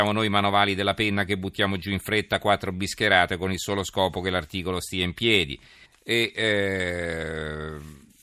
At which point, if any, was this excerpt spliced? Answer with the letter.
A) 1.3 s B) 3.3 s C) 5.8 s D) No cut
C